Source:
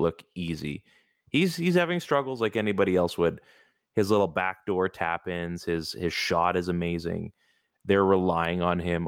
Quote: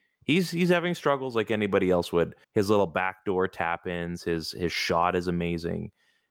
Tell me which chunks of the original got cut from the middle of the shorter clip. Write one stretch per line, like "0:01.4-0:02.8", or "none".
0:03.5-0:03.8